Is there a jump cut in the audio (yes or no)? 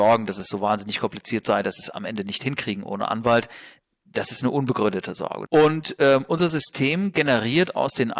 yes